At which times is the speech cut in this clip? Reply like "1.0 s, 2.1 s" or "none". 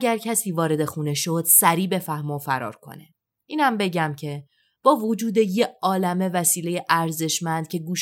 none